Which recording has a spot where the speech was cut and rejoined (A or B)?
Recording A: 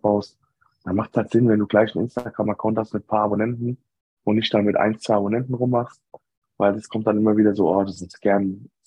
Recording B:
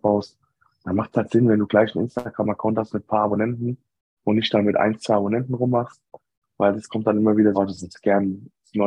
B